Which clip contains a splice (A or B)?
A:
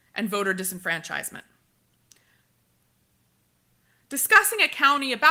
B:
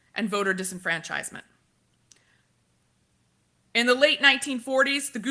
B